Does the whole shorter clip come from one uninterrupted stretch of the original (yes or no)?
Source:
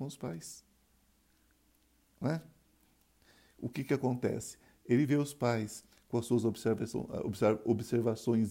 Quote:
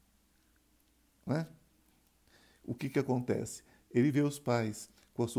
yes